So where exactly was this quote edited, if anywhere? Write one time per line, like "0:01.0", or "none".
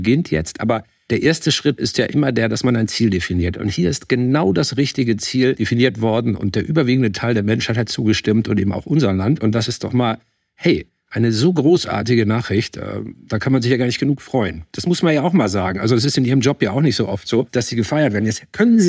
none